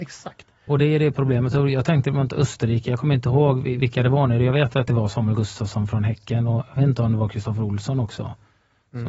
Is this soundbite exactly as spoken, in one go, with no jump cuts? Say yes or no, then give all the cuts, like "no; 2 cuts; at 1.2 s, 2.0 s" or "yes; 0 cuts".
yes; 0 cuts